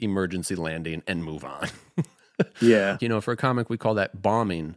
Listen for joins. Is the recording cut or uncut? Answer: cut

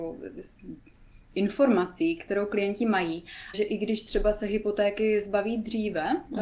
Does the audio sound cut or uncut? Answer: cut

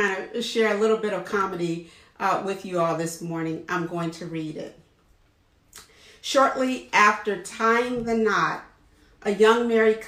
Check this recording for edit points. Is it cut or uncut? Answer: uncut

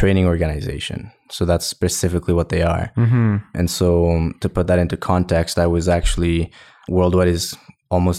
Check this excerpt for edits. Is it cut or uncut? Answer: uncut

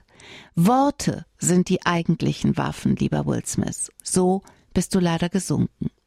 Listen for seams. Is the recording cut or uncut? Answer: cut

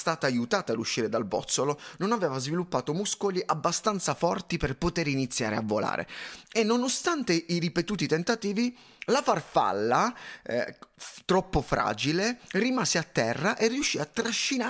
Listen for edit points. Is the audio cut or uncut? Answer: uncut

